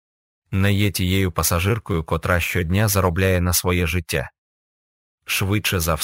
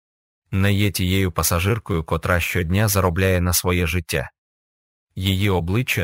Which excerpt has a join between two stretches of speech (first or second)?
second